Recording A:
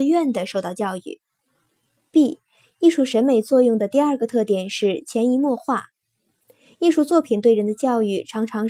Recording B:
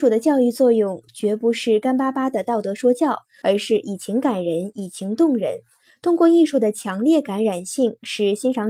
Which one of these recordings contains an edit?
B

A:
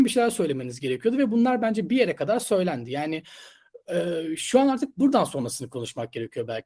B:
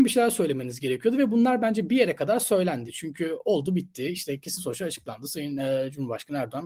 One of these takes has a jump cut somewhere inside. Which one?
B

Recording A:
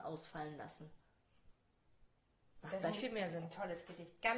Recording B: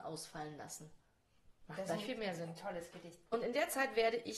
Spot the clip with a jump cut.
B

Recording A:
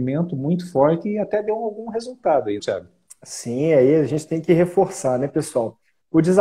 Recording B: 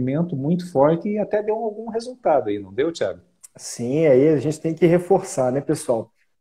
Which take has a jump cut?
A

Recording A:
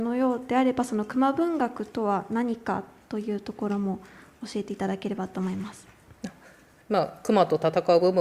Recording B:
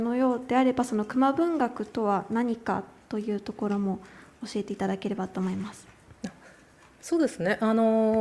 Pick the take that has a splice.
A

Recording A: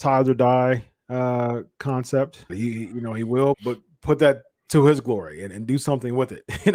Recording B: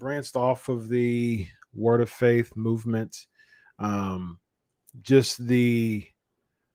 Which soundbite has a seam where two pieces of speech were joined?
A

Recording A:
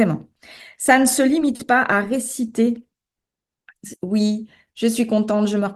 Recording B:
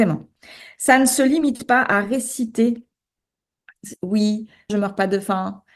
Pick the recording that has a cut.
B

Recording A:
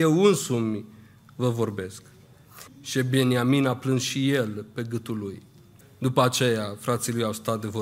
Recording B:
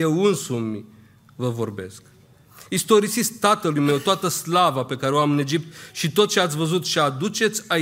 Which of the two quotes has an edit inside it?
A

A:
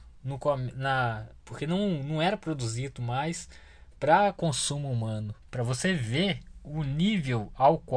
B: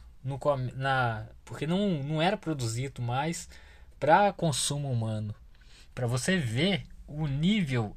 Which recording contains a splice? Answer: A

